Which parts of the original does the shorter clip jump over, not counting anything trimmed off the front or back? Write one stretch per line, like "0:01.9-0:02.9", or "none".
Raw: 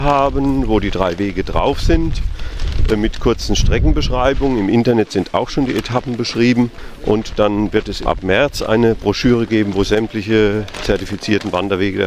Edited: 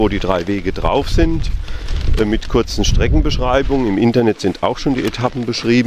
none